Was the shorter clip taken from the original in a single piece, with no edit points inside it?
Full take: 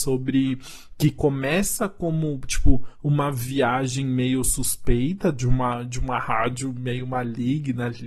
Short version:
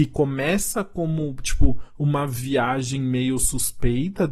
yes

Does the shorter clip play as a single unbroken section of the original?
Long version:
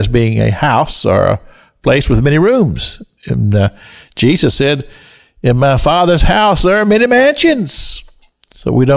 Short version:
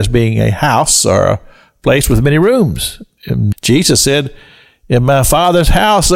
no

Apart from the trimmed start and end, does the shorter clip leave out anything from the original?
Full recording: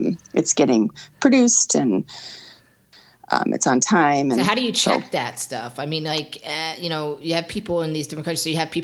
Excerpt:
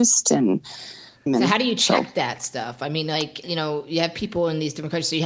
yes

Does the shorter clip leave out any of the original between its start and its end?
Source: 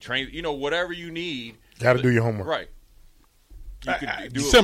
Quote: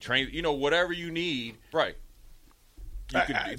yes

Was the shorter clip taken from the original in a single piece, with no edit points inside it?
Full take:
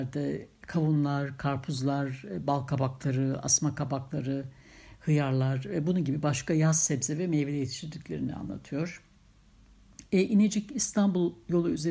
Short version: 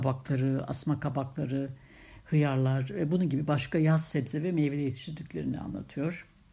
yes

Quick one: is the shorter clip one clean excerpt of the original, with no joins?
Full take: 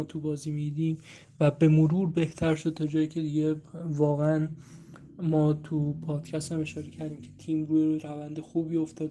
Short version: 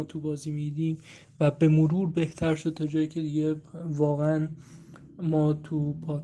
yes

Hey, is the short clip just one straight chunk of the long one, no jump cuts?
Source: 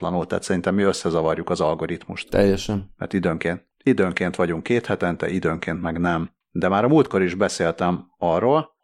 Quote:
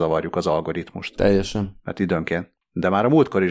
no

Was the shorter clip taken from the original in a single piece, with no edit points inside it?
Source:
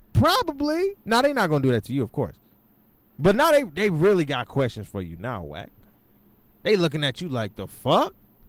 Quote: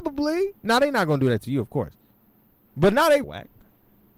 no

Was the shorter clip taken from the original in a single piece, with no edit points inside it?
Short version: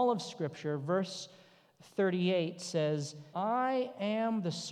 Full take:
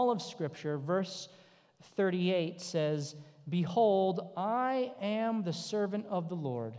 no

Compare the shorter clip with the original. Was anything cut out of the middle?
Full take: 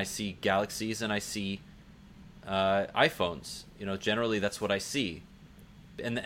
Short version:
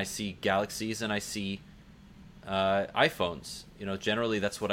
no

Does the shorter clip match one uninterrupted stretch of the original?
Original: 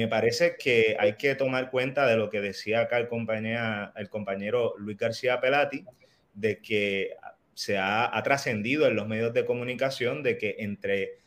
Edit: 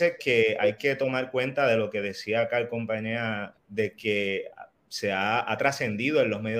no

